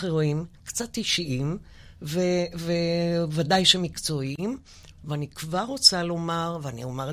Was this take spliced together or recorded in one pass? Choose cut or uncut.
uncut